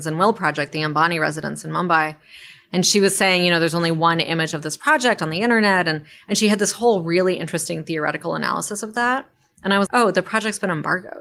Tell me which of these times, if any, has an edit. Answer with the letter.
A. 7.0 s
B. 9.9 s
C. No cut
B